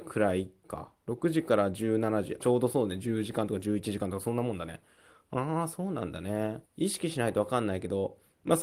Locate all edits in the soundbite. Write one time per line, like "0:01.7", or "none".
0:02.4
0:06.7